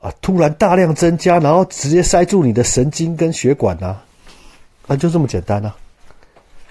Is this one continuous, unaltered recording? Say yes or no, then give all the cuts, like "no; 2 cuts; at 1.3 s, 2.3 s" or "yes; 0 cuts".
yes; 0 cuts